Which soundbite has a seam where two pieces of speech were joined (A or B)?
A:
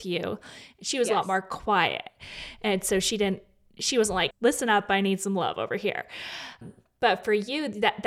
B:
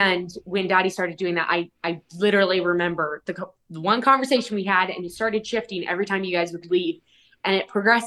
A